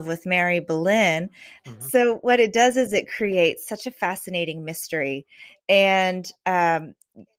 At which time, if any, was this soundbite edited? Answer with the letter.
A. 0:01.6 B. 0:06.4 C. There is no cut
A